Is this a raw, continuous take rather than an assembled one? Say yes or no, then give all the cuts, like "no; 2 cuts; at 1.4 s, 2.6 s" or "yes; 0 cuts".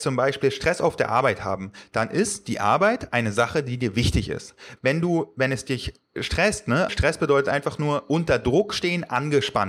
no; 2 cuts; at 4.8 s, 6.9 s